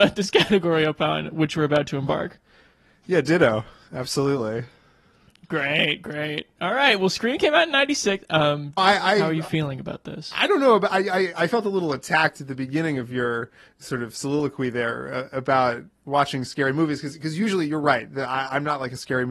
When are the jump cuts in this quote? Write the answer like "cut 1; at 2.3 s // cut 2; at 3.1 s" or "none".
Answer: cut 1; at 8.8 s

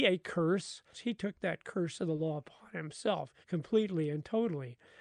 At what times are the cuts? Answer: cut 1; at 0.9 s // cut 2; at 3.4 s

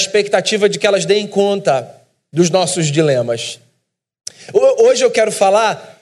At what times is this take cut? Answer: none

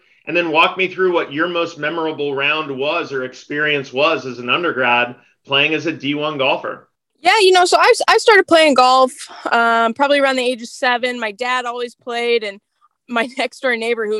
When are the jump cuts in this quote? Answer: none

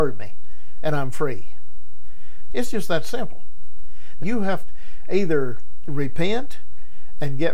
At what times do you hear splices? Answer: cut 1; at 2.5 s // cut 2; at 4.2 s

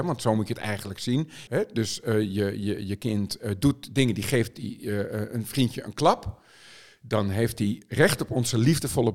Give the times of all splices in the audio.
cut 1; at 1.5 s

